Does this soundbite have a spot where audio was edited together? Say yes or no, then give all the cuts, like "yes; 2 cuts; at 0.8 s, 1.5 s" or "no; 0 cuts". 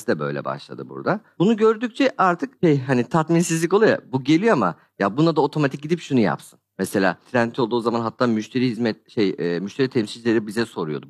no; 0 cuts